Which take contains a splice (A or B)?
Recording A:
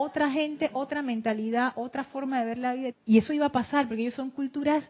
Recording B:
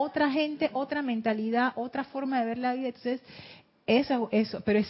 A